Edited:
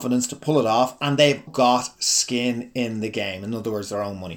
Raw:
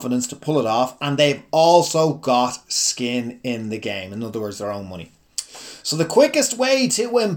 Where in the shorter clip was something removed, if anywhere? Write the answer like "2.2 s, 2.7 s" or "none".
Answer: 1.5 s